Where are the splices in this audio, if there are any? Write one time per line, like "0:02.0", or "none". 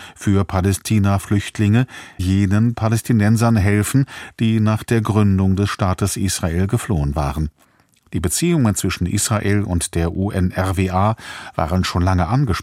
0:02.2